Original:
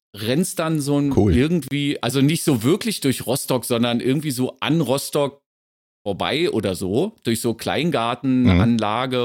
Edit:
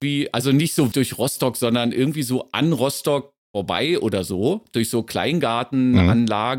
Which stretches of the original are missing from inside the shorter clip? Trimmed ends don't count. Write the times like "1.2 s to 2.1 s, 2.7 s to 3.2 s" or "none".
2.6 s to 3.0 s, 5.5 s to 5.9 s